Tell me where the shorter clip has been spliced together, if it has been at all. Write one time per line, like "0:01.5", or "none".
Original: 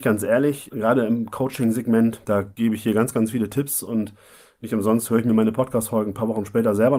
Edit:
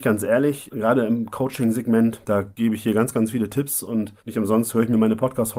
0:04.2